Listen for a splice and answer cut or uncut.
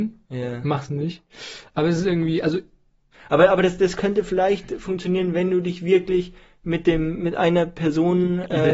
uncut